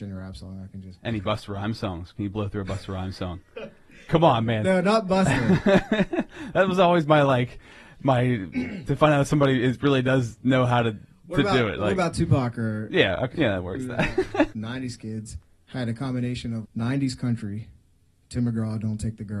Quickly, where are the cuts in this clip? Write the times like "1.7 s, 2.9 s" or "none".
13.3 s, 14.5 s, 16.6 s